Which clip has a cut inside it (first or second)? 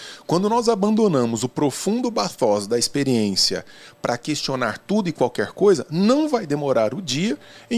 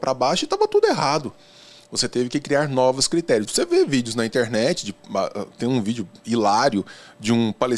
second